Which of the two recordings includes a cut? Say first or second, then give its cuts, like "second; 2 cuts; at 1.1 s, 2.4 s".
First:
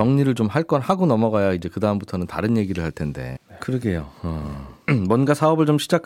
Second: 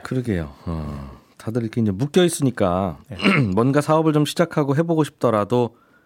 first; 2 cuts; at 3.4 s, 4.9 s